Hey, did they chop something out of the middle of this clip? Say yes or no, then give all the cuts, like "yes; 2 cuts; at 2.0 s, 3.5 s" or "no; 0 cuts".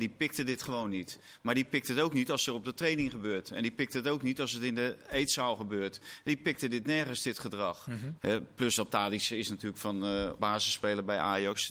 yes; 2 cuts; at 8.2 s, 10.4 s